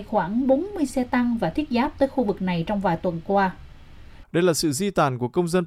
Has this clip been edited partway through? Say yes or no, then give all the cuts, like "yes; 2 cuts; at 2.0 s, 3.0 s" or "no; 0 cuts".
yes; 1 cut; at 4.2 s